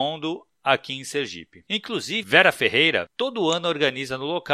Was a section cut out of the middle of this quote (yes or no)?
yes